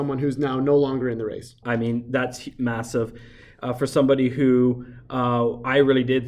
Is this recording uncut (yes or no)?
no